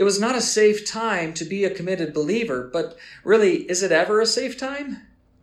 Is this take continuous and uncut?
yes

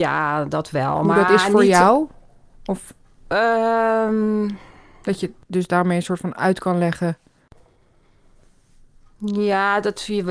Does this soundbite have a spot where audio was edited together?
no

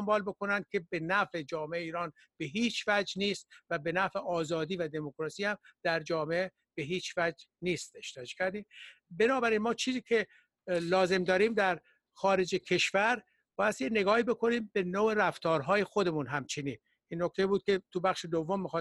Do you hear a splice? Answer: no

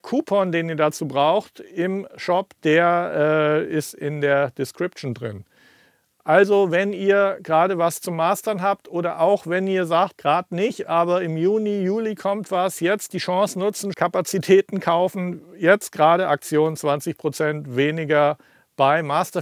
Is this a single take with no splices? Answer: no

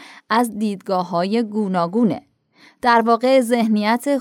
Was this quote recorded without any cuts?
yes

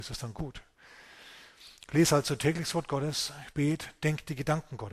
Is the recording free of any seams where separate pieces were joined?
yes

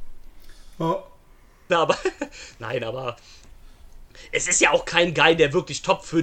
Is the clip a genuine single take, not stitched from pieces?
no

